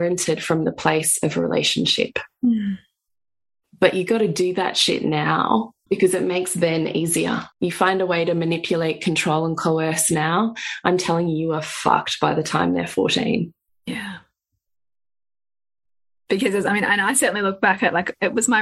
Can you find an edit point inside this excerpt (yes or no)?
yes